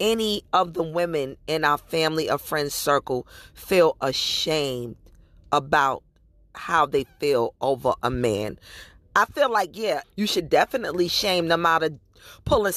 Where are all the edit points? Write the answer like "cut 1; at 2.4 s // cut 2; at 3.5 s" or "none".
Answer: cut 1; at 10.0 s